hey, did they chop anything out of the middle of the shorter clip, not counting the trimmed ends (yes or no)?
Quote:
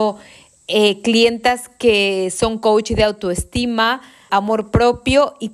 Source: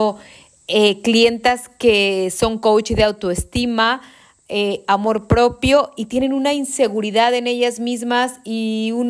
yes